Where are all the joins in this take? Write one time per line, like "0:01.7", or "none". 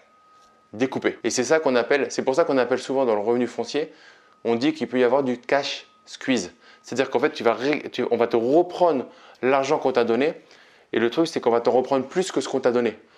none